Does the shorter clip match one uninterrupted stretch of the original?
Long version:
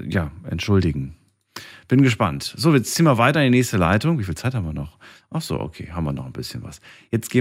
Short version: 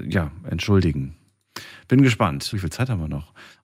no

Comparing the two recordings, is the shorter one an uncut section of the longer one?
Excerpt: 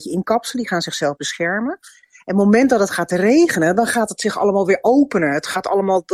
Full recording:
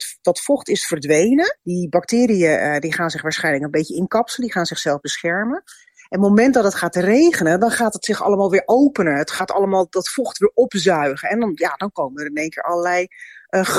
yes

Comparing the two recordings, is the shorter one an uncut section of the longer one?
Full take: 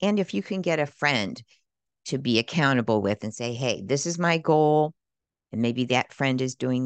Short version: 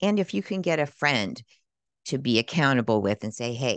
yes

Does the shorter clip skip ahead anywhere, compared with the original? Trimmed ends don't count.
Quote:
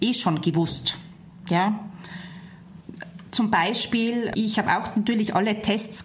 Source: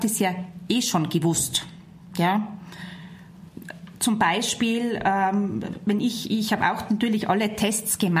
yes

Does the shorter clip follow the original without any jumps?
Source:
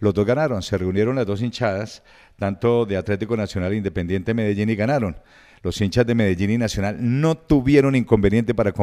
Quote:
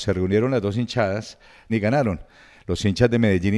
no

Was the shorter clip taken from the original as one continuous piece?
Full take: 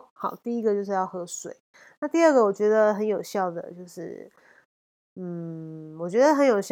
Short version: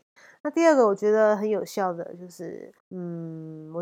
no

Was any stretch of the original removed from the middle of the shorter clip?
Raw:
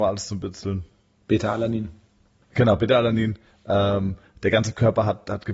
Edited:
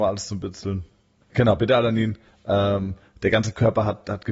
yes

